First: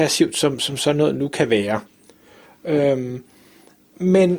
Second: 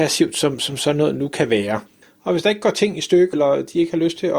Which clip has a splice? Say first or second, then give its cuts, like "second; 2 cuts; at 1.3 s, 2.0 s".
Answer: second; 2 cuts; at 2.0 s, 3.3 s